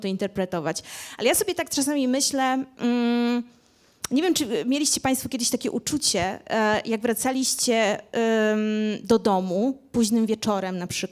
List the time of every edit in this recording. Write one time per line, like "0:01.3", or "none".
none